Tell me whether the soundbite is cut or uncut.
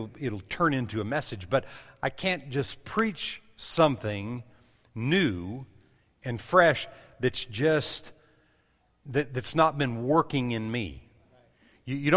uncut